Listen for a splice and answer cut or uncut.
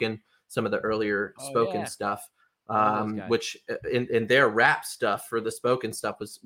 uncut